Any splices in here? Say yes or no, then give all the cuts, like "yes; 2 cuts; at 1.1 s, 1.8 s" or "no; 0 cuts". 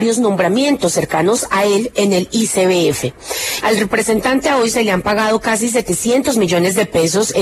yes; 1 cut; at 3.6 s